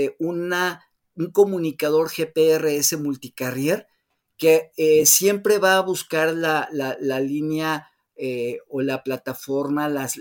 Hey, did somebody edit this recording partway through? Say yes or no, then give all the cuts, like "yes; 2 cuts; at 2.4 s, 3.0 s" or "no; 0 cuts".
no; 0 cuts